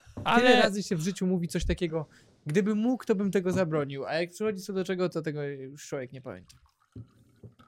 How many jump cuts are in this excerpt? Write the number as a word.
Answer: zero